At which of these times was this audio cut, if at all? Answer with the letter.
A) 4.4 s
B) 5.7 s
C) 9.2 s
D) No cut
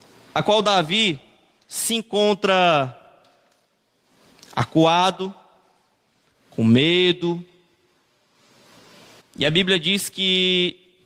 C